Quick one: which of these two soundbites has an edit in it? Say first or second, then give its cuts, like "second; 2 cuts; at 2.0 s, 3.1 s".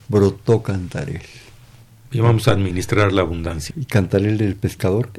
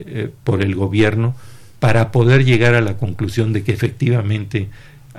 first; 1 cut; at 3.7 s